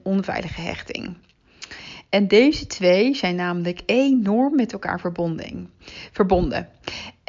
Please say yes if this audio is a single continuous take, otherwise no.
yes